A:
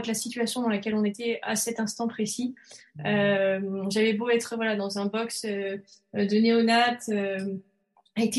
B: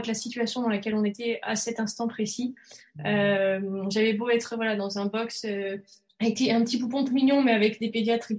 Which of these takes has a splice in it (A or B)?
B